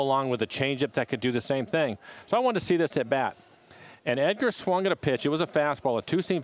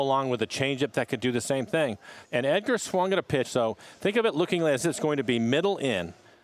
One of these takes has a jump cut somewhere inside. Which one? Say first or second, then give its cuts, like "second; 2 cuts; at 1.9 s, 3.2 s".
second; 2 cuts; at 2.2 s, 3.4 s